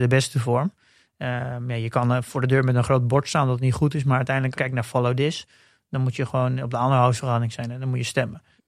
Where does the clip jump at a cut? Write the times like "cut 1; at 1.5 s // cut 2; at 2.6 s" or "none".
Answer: cut 1; at 4.5 s